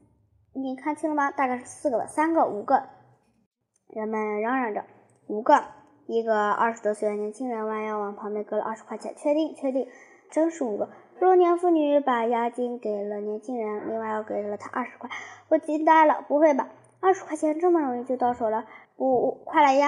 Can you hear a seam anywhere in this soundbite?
yes; 2 cuts; at 10.3 s, 18.8 s

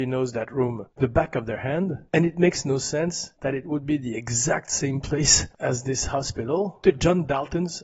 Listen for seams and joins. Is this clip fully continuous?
no; 2 cuts; at 1.0 s, 6.8 s

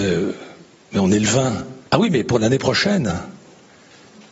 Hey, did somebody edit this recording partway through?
yes; 1 cut; at 1.9 s

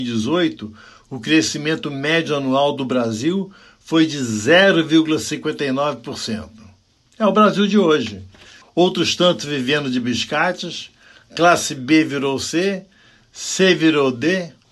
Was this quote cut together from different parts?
yes; 1 cut; at 8.6 s

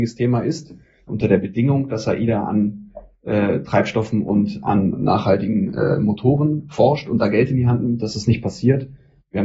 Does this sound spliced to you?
yes; 1 cut; at 1.1 s

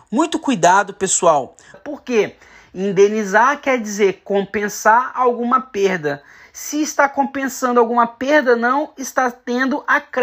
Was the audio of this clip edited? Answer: yes; 1 cut; at 1.7 s

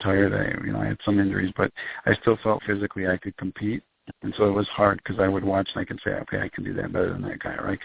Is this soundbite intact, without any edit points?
no; 2 cuts; at 2.6 s, 4.1 s

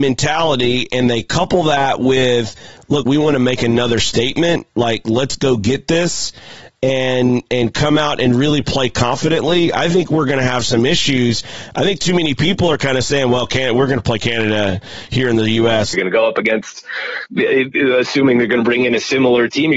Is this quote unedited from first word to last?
no; 2 cuts; at 3.0 s, 15.9 s

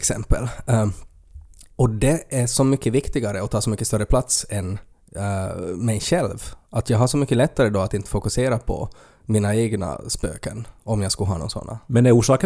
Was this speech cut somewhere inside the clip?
yes; 1 cut; at 1.7 s

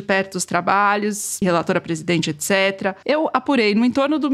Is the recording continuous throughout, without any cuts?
no; 2 cuts; at 1.4 s, 3.0 s

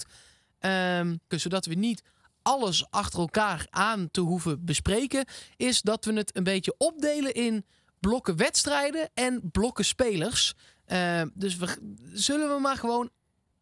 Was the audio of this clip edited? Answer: yes; 1 cut; at 1.3 s

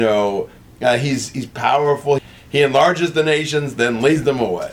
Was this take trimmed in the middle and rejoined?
yes; 1 cut; at 2.2 s

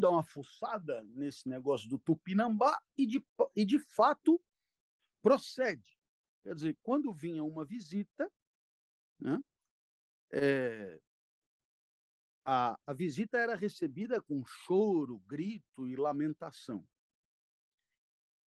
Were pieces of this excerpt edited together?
no; 0 cuts

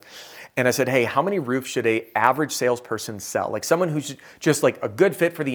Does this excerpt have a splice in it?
no; 0 cuts

